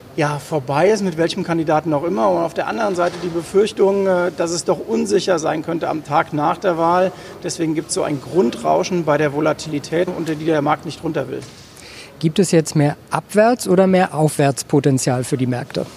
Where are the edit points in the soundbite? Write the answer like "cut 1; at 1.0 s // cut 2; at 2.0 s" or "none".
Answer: cut 1; at 10.1 s